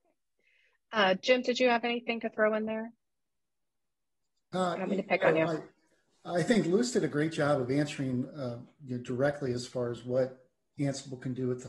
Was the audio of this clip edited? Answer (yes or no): no